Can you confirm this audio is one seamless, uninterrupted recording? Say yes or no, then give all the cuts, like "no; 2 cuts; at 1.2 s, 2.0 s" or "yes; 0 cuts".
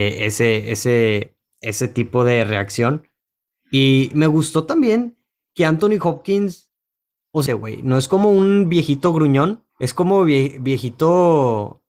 no; 2 cuts; at 7.5 s, 9.7 s